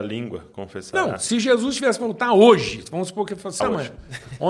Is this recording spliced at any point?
yes; 1 cut; at 3.6 s

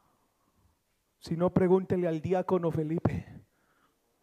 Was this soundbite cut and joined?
no; 0 cuts

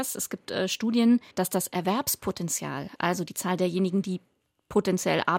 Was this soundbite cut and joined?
yes; 1 cut; at 1.3 s

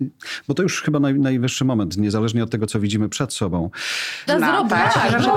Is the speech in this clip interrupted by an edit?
yes; 1 cut; at 4.3 s

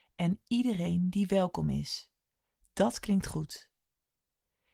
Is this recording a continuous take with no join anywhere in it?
yes; 0 cuts

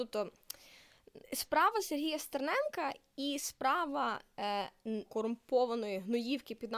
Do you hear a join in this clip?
yes; 2 cuts; at 1.2 s, 5.1 s

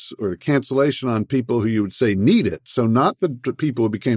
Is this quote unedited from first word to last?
yes; 0 cuts

